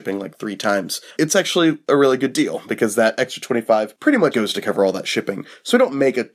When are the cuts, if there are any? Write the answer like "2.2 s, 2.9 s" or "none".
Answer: 1.2 s, 4.3 s